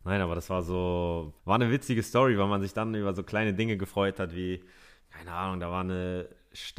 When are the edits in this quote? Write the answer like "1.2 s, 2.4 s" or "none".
1.4 s